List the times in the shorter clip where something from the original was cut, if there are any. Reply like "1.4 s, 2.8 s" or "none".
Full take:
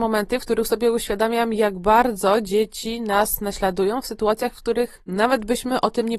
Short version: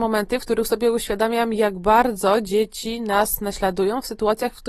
none

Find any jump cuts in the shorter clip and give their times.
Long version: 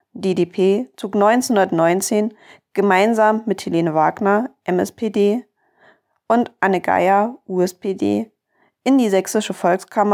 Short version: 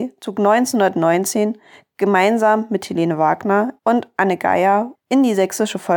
3.8 s, 4.9 s

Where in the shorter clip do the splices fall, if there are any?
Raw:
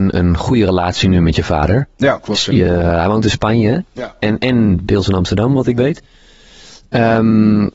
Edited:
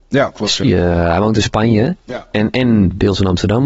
none

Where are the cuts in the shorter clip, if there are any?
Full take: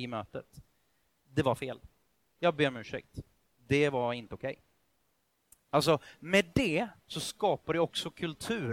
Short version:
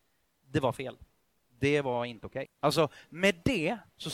1.4 s, 2.5 s

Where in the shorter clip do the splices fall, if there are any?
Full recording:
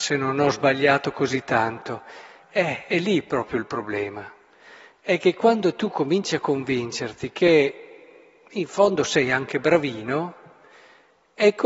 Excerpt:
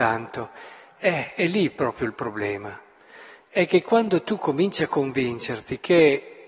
none

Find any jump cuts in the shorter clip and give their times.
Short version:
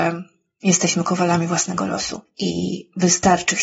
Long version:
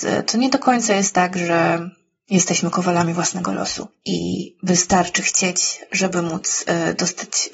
none

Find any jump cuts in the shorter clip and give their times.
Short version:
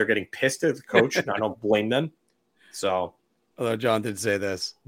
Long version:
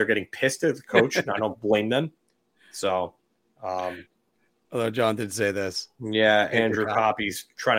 3.4 s

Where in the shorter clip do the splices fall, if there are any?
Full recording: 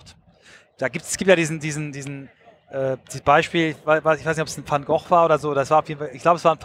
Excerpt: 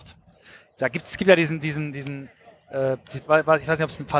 3.2 s

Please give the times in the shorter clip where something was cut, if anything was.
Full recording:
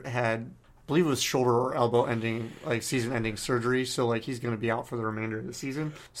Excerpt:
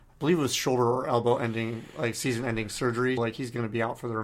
3.2 s

